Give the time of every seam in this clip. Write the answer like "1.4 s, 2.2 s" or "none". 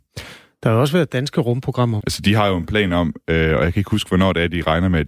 2.0 s